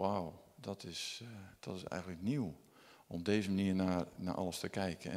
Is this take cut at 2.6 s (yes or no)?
no